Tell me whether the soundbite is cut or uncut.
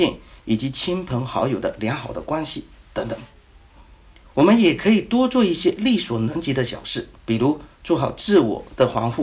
cut